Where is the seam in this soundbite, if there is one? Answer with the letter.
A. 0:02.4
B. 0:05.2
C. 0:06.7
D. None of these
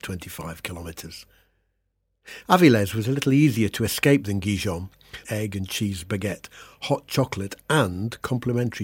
B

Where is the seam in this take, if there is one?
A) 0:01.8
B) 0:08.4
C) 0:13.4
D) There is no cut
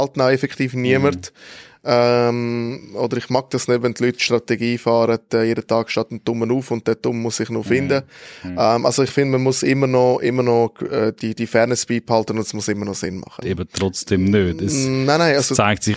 C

